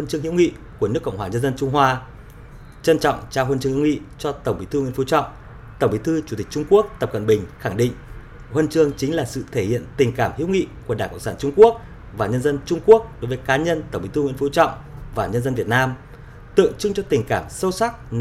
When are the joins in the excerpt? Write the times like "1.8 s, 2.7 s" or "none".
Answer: none